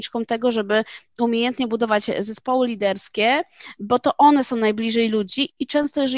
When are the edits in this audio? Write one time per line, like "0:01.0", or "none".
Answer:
none